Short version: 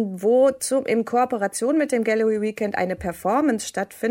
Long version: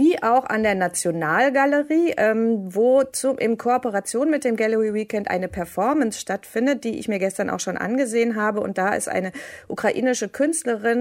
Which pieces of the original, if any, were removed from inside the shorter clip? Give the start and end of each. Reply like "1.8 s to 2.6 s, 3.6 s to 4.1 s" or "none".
none

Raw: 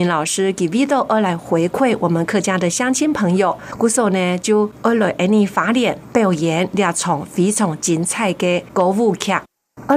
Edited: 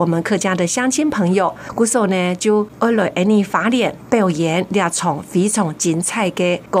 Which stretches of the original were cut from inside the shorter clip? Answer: none

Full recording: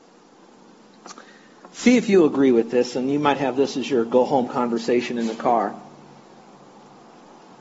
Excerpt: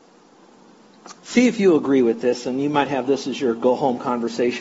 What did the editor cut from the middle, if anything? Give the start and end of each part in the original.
1.2 s to 1.7 s

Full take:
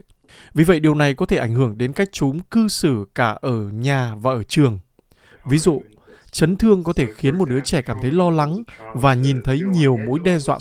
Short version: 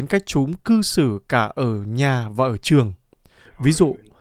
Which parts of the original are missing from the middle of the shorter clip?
none

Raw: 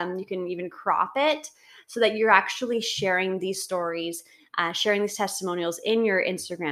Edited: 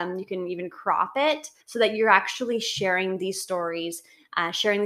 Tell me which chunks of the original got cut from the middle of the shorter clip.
1.6 s to 1.8 s

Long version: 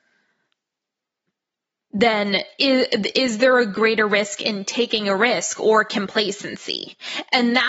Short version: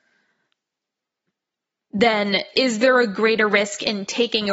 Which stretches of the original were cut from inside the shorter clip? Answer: 2.5 s to 3.1 s

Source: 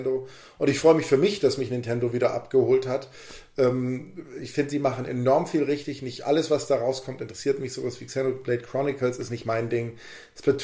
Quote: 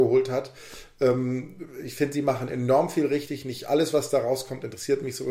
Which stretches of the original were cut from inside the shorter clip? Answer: none

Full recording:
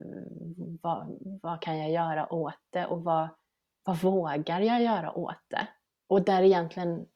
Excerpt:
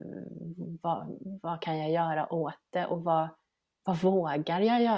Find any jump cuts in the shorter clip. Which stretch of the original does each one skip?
none

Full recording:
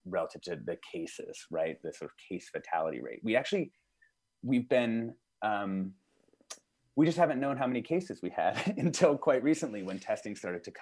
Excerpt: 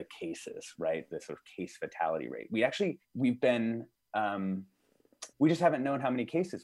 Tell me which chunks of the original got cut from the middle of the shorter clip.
3.8 s to 4.3 s, 6.6 s to 6.9 s

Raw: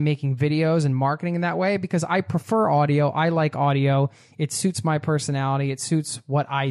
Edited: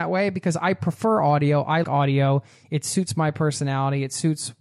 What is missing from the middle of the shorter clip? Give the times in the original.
3.3 s to 3.5 s

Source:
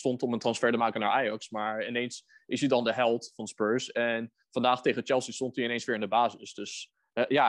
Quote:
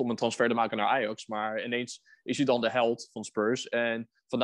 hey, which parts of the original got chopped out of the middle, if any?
none

